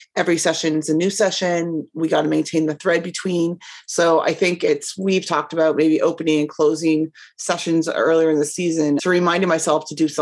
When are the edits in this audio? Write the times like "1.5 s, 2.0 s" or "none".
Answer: 9.0 s